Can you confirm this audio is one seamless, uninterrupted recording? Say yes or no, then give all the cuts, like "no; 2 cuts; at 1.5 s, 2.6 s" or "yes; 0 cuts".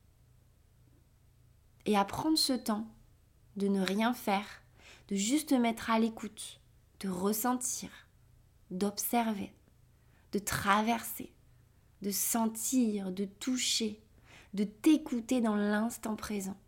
yes; 0 cuts